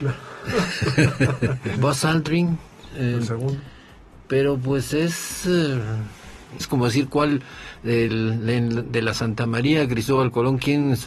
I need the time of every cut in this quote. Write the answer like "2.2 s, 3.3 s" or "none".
1.8 s, 6.6 s, 8.1 s

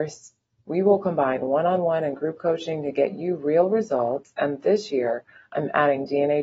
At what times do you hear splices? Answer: none

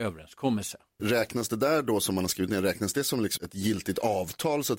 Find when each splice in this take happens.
1.0 s, 3.4 s

